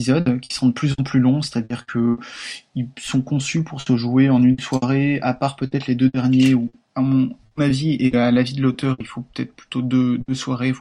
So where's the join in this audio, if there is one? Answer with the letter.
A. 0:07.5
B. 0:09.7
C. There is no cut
C